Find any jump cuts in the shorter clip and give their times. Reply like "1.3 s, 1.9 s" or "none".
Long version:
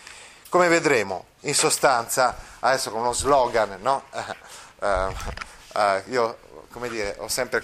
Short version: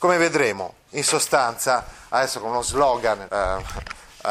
3.3 s